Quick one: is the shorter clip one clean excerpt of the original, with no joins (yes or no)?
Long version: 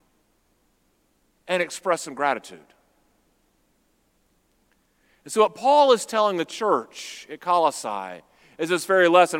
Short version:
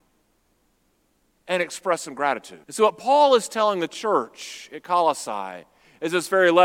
no